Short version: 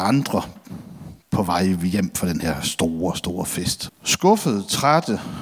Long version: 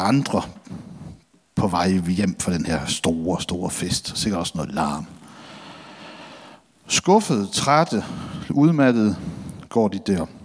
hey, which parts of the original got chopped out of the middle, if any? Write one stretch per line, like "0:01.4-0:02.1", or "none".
0:01.2-0:01.5
0:04.1-0:06.7

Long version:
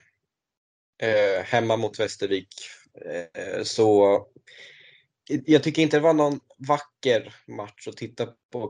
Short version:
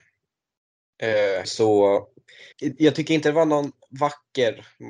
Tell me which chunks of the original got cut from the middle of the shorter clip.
0:01.4-0:03.6
0:04.7-0:05.2

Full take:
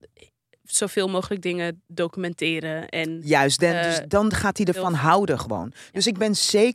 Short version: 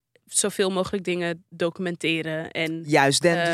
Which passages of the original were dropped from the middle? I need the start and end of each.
none

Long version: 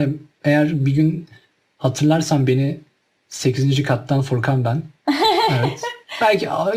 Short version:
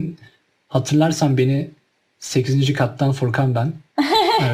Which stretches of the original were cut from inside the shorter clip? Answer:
none

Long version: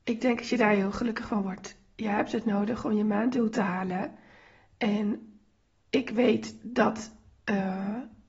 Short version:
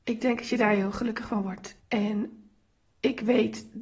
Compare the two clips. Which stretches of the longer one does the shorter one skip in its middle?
0:01.8-0:04.7

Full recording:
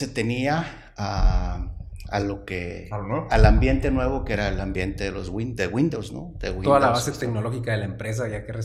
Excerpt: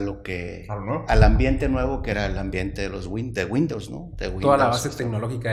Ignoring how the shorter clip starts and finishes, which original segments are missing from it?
none

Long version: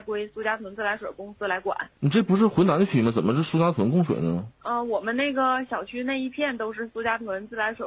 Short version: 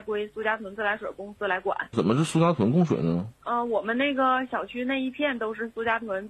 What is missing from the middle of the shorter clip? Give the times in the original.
0:01.9-0:03.1

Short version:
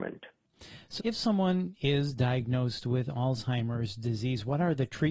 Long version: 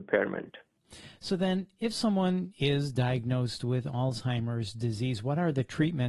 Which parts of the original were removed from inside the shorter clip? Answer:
0:01.3-0:01.8

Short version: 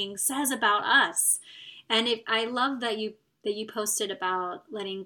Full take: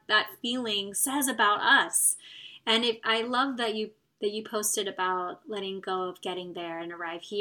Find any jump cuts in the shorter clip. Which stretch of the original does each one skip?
none

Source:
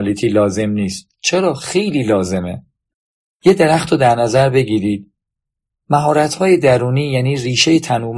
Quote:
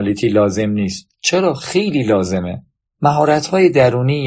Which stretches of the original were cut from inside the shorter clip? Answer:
0:02.8-0:05.7

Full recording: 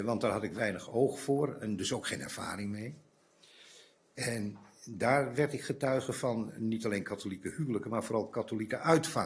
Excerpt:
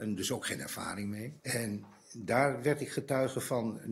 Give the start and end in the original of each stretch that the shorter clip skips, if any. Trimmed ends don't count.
0:03.0-0:04.1

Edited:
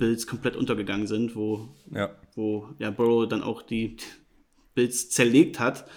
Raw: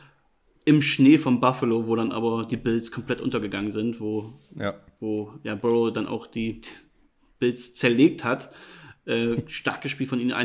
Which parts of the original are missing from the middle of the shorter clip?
none

